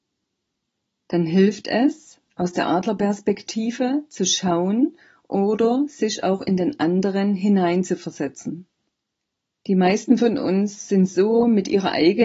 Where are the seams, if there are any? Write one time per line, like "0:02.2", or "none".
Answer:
0:09.6